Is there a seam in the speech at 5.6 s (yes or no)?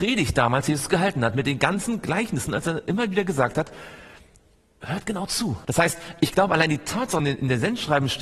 yes